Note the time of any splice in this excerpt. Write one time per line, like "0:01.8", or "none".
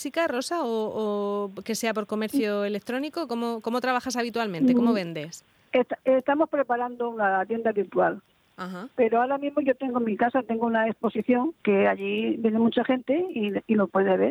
0:11.6